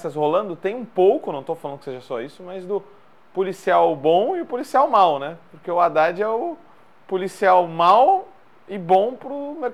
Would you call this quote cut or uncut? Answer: uncut